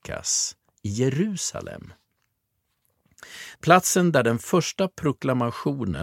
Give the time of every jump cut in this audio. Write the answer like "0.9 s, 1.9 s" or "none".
3.6 s

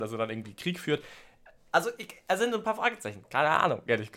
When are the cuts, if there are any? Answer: none

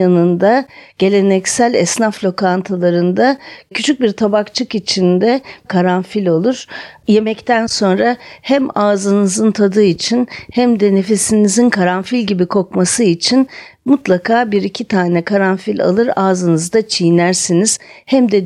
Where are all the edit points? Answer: none

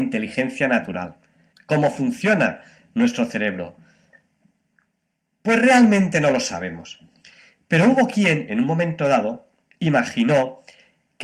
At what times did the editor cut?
1.5 s

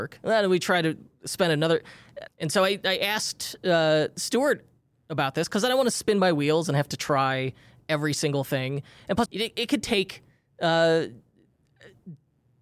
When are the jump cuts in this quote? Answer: 2.3 s, 9.3 s

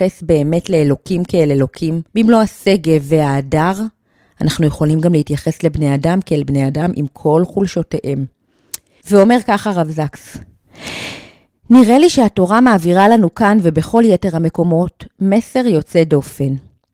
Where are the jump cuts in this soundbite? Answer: 2.1 s, 9.0 s

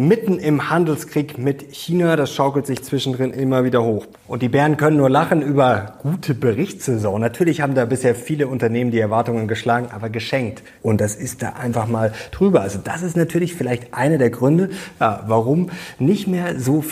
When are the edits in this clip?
4.1 s, 10.8 s

